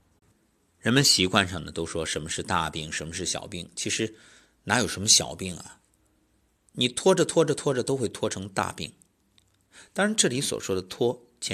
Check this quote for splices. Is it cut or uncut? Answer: uncut